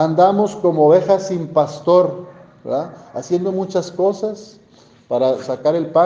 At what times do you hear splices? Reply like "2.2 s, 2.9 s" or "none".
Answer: none

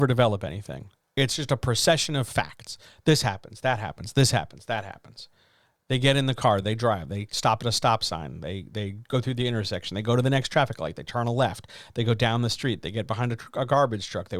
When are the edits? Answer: none

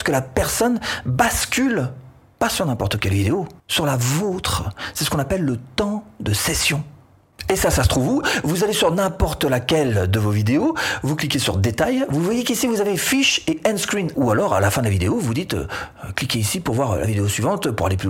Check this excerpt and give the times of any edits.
3.6 s, 14.1 s

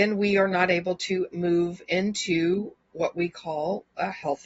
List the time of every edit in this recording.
1.3 s

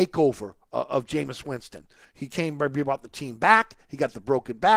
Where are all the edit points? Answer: 2.0 s

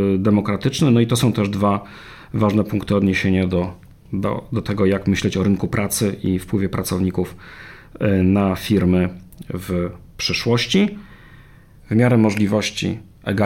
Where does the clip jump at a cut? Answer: 11.8 s

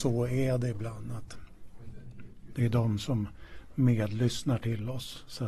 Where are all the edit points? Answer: 2.5 s

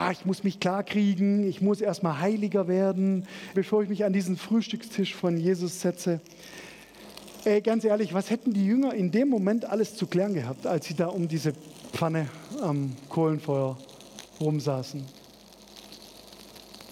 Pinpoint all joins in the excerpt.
3.5 s

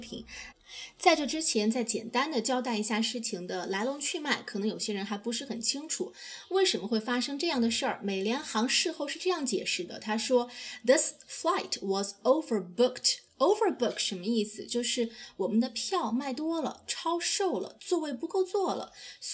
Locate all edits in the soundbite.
none

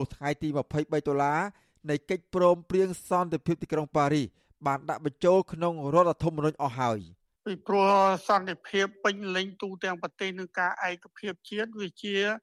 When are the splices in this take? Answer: none

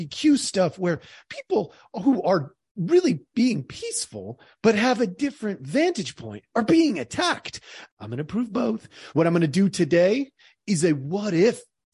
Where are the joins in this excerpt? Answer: 7.9 s, 9.1 s

